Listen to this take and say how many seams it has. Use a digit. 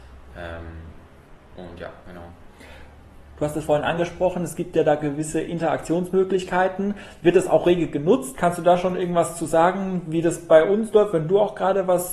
0